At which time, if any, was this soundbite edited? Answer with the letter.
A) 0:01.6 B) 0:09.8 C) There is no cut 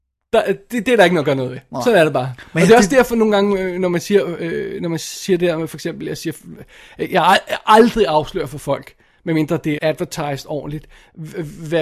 B